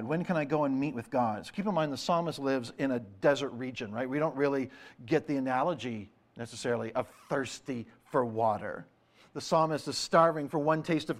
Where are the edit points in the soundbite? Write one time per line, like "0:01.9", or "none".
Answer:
none